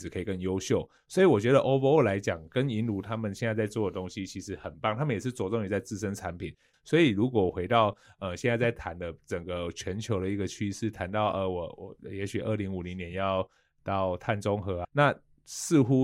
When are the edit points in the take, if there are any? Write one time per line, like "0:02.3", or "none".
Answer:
0:01.0
0:06.7
0:14.8

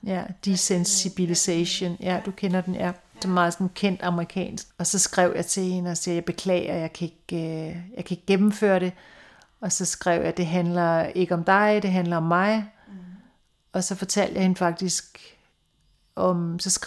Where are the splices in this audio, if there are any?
0:04.7

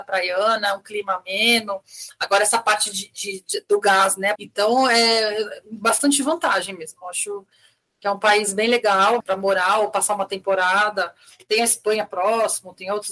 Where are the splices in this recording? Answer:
0:04.4
0:09.2

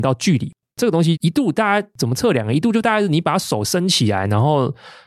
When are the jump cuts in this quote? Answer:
0:01.2

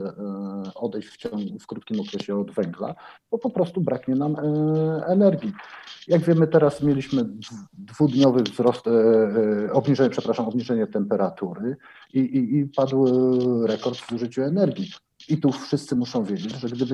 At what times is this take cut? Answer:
none

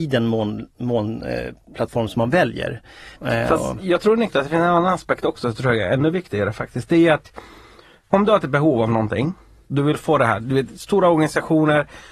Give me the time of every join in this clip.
0:03.2

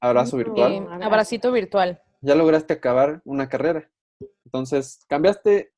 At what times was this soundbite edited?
0:02.2
0:04.4

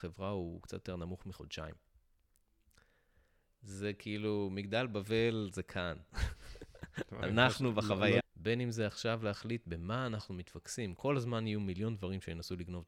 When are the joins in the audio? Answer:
0:08.2
0:11.0

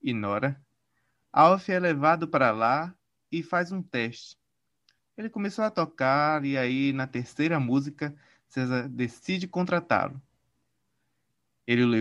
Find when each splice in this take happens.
none

